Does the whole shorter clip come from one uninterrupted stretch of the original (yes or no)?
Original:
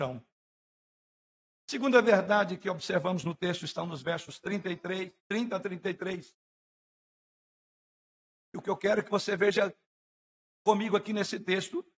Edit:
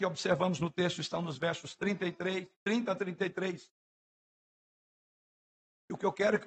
yes